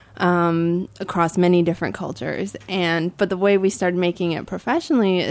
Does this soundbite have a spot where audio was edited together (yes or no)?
no